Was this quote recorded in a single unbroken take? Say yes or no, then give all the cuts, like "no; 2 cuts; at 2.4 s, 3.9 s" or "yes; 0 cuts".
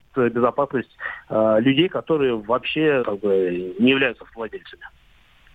no; 1 cut; at 3.0 s